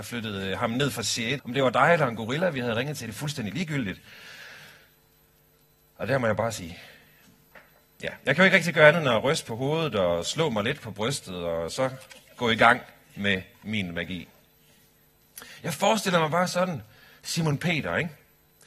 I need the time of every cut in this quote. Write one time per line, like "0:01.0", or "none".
0:01.4